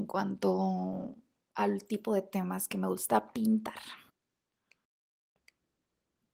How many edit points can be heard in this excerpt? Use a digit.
1